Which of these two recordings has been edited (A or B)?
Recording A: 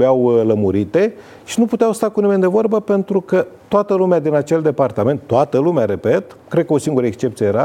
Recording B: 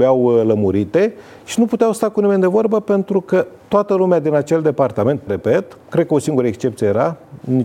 B